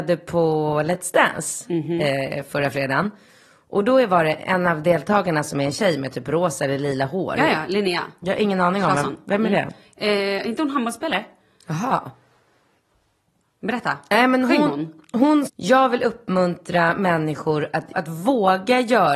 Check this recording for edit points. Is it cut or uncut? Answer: cut